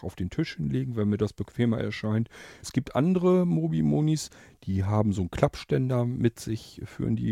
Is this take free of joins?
no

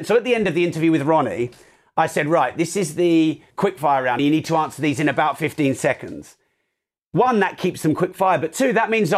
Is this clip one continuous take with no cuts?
no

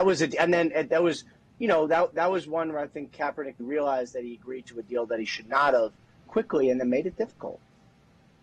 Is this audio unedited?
no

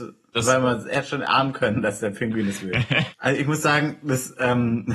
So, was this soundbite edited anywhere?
yes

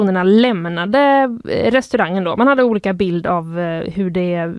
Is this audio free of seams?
yes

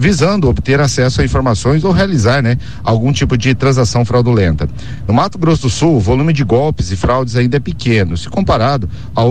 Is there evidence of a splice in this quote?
no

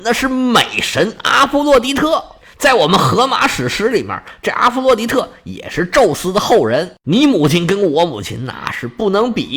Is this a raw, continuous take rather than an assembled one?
yes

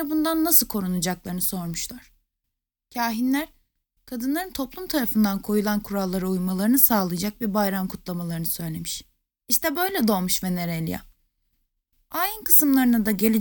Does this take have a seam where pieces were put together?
no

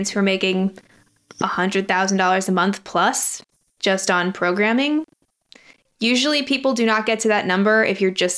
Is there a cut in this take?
no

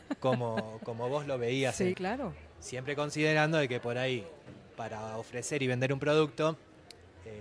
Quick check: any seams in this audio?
yes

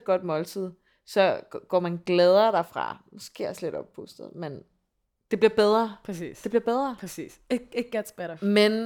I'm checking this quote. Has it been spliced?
no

